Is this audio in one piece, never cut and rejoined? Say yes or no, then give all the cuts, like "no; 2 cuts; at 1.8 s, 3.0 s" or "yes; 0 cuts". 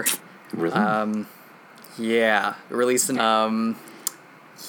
no; 1 cut; at 3.1 s